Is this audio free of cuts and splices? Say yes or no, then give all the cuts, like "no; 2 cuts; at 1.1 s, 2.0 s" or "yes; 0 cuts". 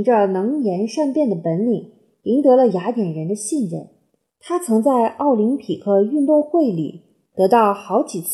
no; 1 cut; at 4.2 s